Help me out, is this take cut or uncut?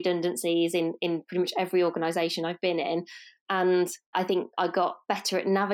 cut